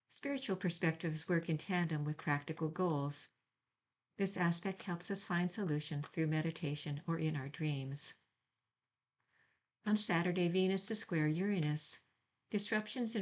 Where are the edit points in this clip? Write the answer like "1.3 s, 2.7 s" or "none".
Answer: none